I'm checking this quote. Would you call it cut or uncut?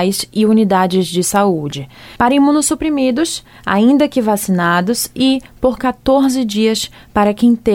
cut